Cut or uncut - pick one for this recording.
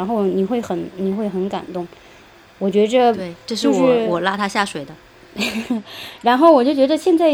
uncut